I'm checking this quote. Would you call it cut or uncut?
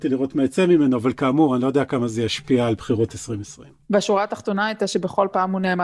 uncut